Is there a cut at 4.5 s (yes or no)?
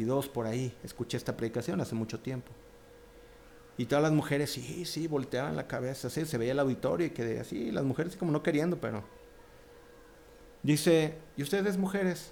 no